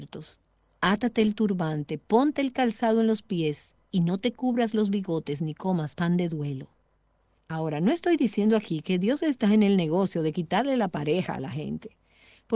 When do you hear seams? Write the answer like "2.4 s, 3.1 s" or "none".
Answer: 7.4 s